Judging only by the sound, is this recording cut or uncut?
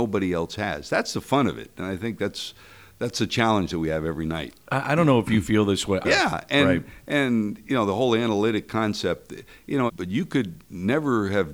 cut